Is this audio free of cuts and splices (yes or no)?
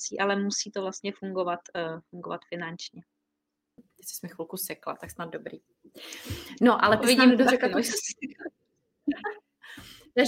no